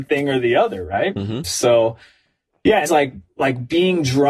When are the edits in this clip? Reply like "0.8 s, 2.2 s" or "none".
1.4 s, 2.9 s